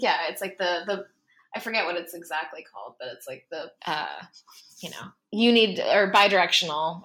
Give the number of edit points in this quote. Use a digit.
1